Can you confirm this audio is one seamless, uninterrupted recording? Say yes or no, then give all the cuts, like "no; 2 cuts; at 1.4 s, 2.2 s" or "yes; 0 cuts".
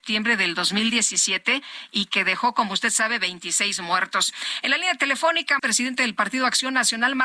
no; 1 cut; at 5.6 s